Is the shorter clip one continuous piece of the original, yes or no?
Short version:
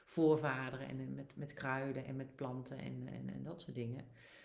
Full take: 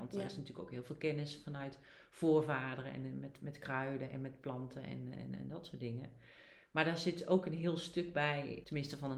yes